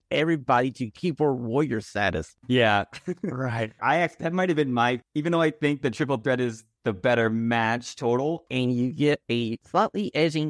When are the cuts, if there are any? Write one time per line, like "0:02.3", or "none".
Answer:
0:03.8
0:08.5

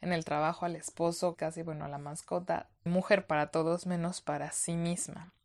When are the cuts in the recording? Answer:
0:01.3
0:02.9

